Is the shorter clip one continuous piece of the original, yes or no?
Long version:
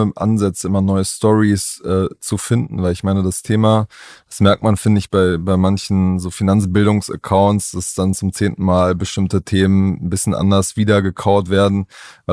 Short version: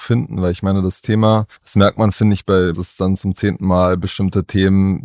no